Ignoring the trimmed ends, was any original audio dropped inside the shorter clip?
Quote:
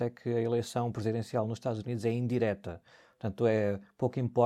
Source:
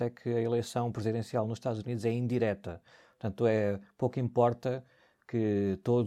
no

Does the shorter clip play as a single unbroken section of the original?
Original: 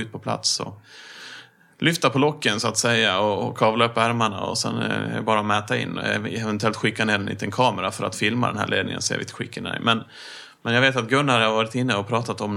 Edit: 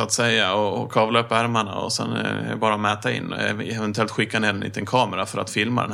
yes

